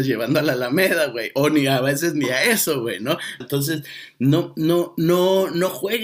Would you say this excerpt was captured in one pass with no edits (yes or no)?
no